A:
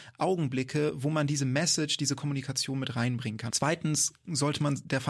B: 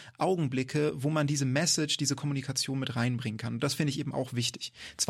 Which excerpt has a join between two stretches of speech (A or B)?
A